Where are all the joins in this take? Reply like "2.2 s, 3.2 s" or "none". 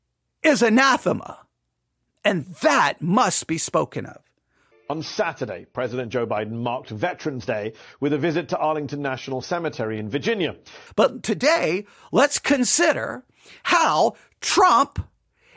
4.7 s, 10.9 s